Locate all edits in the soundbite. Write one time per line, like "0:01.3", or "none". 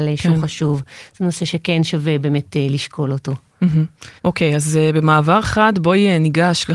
0:04.2